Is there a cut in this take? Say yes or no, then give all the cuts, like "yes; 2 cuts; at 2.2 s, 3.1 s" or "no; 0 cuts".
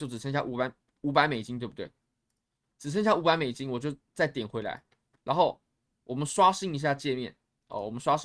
no; 0 cuts